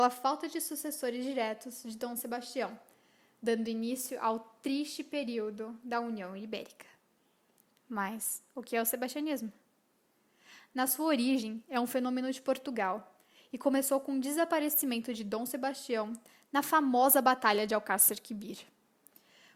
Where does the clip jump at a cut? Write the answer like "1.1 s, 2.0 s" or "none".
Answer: 7.7 s

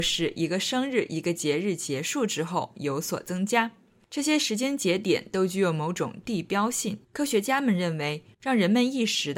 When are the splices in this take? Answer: 7.0 s, 8.3 s

